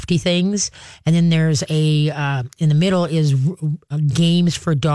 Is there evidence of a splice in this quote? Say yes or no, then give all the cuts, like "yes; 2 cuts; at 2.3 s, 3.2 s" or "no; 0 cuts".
no; 0 cuts